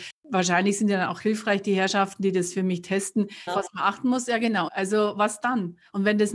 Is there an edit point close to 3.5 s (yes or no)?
yes